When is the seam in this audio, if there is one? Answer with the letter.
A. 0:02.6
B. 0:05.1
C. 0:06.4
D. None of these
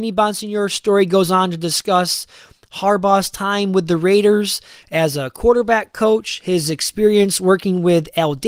D